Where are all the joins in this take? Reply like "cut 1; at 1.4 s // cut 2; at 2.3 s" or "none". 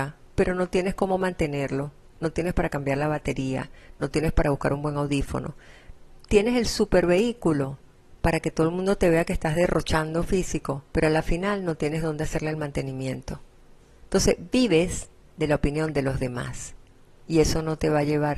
cut 1; at 10.9 s